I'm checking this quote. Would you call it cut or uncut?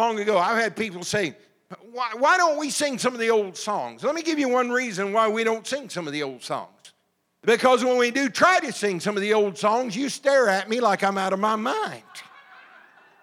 uncut